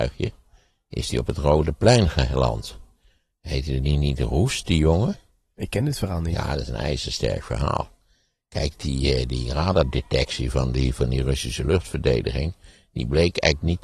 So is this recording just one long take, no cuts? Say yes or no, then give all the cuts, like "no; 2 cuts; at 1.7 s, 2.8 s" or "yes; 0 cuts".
yes; 0 cuts